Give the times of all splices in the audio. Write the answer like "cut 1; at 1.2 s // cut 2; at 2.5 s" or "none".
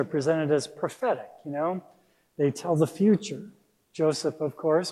none

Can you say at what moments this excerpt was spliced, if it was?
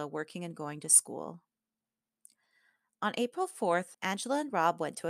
cut 1; at 3.9 s

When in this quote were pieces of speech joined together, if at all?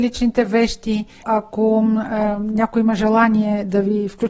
cut 1; at 1.2 s

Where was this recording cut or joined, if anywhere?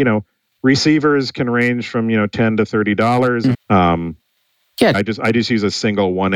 cut 1; at 3.5 s // cut 2; at 4.9 s

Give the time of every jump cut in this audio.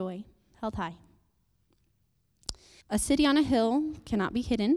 cut 1; at 2.8 s

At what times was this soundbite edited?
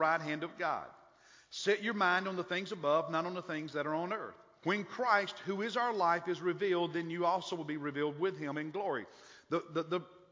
cut 1; at 4.6 s

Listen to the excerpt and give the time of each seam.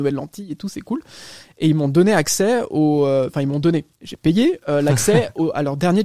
cut 1; at 3.9 s

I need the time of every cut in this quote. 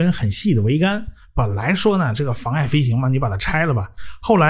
none

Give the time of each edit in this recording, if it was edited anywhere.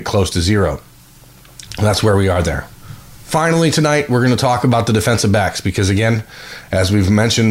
cut 1; at 1.7 s

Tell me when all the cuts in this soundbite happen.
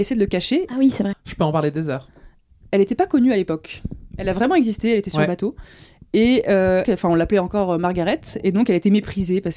cut 1; at 1.1 s // cut 2; at 6.8 s

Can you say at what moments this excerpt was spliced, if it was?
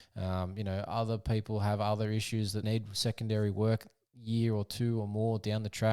cut 1; at 2.6 s

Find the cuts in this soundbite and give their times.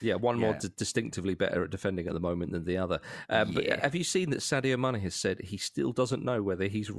none

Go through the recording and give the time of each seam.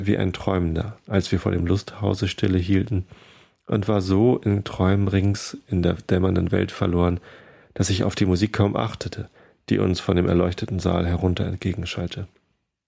none

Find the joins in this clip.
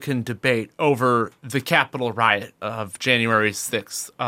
none

